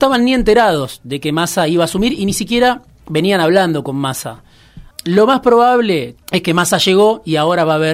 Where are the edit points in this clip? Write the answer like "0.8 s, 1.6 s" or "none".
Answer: 4.9 s, 6.2 s